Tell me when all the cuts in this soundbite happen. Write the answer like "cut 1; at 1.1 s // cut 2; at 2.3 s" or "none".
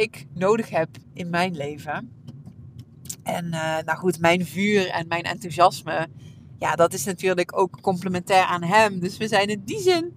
cut 1; at 1.0 s